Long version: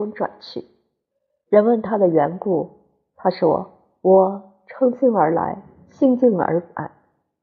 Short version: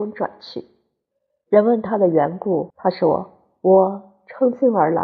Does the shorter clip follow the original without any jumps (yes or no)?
no